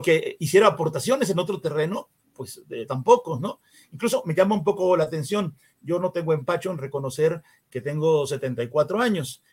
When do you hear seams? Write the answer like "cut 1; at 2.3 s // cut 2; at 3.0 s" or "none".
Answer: none